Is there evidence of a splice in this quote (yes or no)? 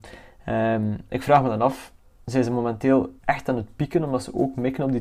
yes